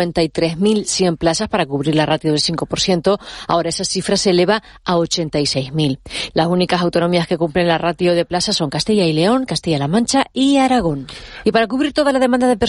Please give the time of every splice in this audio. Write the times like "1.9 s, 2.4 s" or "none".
6.3 s, 11.4 s